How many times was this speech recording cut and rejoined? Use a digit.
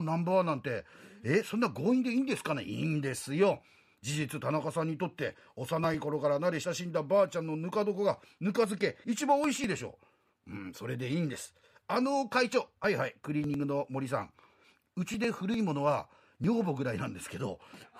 0